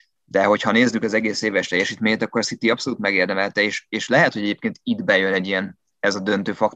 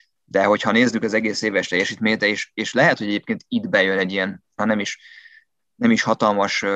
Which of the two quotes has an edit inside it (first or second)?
second